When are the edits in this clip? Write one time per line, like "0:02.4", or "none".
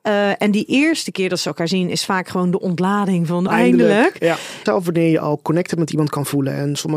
0:03.5
0:04.7